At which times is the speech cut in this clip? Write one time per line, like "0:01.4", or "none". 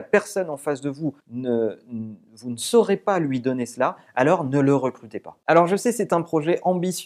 0:01.2